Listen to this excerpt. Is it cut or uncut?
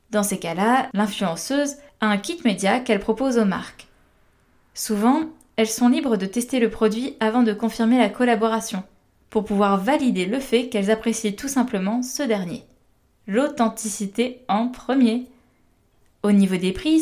uncut